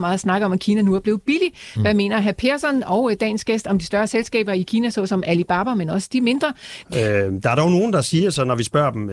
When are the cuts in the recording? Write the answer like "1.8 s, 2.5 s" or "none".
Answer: 6.8 s